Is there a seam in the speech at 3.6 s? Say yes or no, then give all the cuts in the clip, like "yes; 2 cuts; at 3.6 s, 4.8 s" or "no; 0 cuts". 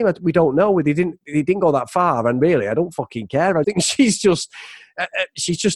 yes; 1 cut; at 3.6 s